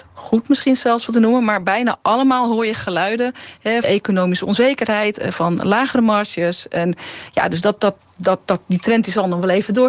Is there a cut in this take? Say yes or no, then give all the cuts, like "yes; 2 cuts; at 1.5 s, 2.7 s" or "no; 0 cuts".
yes; 1 cut; at 3.8 s